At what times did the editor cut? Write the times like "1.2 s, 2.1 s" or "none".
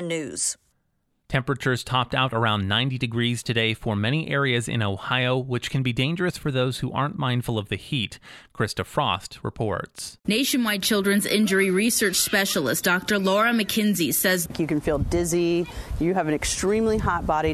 none